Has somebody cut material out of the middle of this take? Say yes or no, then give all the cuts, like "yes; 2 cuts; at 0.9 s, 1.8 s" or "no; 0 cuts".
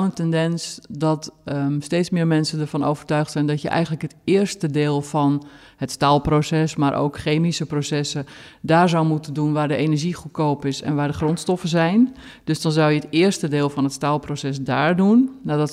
no; 0 cuts